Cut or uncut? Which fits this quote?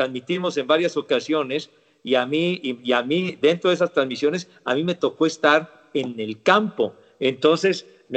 uncut